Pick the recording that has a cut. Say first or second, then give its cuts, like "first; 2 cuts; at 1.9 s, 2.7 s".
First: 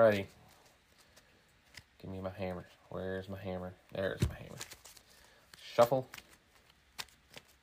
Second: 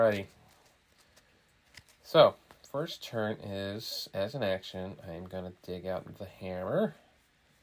first; 1 cut; at 1.8 s